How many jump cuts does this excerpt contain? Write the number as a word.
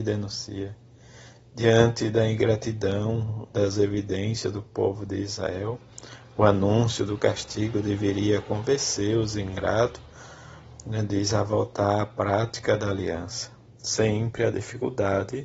zero